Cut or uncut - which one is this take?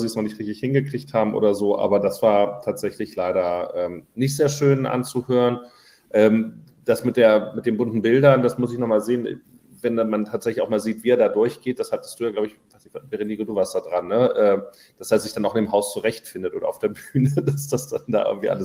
uncut